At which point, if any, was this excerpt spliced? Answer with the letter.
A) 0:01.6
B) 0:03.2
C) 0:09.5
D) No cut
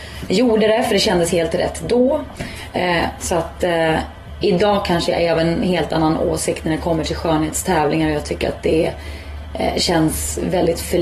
B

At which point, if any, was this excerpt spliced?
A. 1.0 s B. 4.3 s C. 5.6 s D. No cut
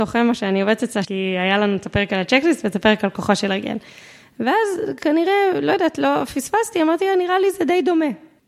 A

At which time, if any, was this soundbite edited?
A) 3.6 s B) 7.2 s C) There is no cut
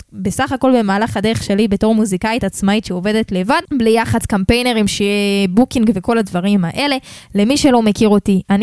A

